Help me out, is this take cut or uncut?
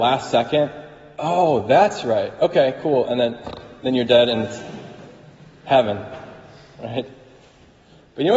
uncut